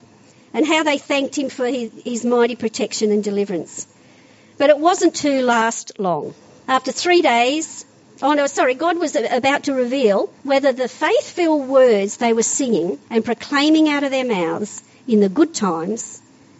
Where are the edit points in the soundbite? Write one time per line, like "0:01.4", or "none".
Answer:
0:06.6
0:10.4
0:13.0